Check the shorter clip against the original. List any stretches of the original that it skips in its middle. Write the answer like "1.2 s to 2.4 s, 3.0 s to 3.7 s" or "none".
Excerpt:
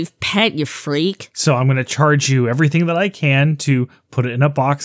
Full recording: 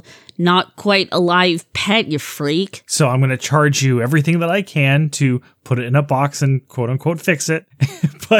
none